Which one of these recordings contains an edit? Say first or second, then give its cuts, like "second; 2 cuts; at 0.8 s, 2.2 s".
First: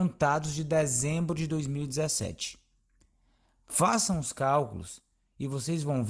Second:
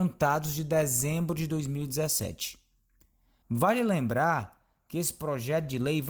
second; 1 cut; at 3.4 s